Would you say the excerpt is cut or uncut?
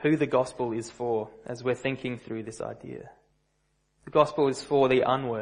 cut